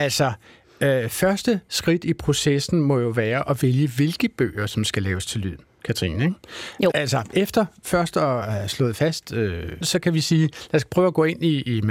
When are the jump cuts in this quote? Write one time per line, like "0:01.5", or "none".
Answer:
0:06.9
0:09.8

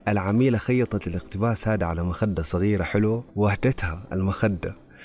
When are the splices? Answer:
0:03.3

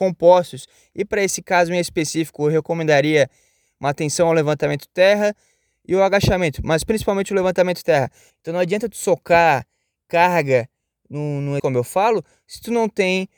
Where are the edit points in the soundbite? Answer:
0:08.3
0:11.6

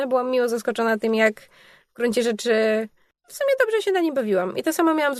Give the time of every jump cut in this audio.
none

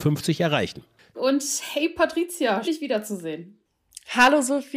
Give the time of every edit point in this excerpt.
0:01.1
0:02.6

